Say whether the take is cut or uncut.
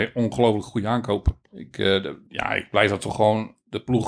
uncut